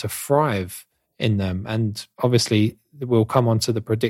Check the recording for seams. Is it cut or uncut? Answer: cut